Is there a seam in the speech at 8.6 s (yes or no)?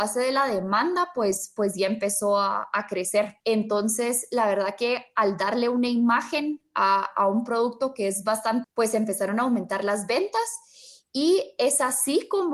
yes